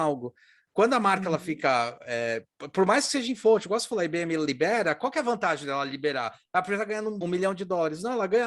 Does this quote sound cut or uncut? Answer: cut